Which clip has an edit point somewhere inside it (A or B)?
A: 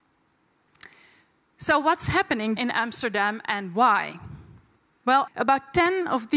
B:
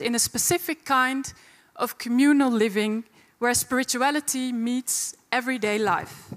A